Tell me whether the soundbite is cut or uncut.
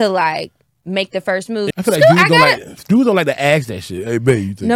cut